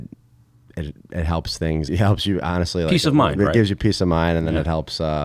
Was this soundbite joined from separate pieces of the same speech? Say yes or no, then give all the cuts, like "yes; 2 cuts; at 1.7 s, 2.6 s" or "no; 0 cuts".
yes; 1 cut; at 1.9 s